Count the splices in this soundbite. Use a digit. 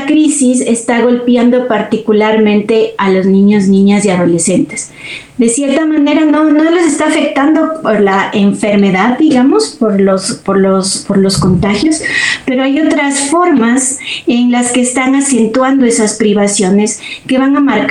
0